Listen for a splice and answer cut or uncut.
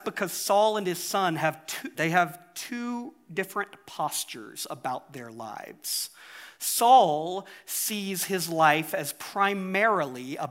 cut